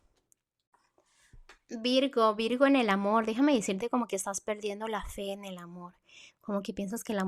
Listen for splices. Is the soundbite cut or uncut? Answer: uncut